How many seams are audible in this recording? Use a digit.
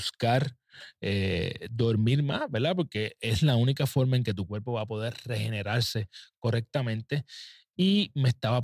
0